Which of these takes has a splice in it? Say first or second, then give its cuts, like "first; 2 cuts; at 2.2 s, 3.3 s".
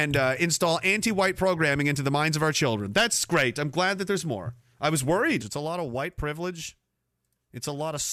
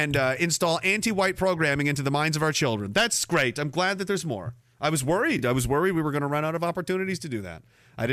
first; 1 cut; at 5.4 s